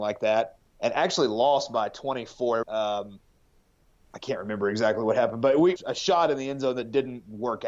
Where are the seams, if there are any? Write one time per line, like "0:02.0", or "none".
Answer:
0:02.6
0:05.8

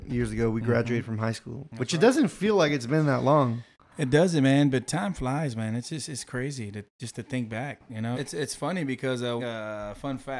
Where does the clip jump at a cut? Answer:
0:08.1
0:09.4

